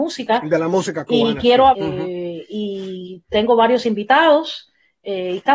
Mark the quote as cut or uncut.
cut